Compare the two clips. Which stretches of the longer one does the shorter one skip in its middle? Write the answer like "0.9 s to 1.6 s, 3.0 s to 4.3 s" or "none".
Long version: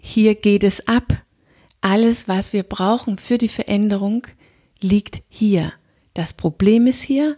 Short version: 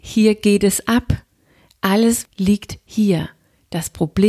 2.3 s to 4.7 s